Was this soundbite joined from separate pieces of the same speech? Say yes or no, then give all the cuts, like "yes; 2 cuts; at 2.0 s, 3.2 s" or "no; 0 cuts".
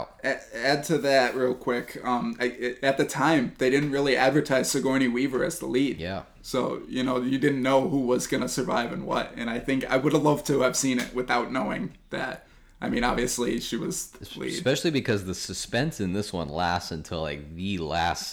yes; 1 cut; at 2.4 s